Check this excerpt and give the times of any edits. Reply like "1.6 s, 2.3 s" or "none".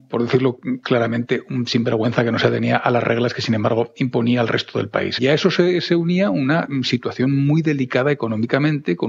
5.2 s